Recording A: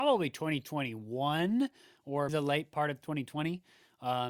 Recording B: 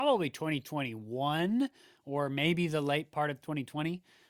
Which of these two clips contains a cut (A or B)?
A